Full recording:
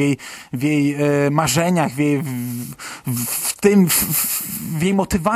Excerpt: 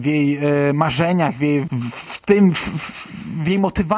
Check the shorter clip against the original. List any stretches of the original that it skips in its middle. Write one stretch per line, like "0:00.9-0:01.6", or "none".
0:02.2-0:03.0